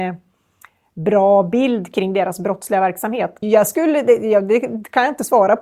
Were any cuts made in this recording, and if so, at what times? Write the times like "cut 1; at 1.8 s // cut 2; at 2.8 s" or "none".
cut 1; at 3.4 s